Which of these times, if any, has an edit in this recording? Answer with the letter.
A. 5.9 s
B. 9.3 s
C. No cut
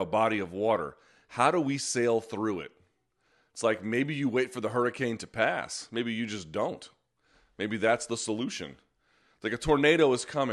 C